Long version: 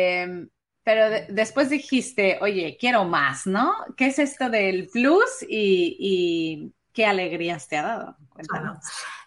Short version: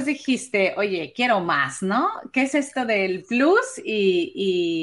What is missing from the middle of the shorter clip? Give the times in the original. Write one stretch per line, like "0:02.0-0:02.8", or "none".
none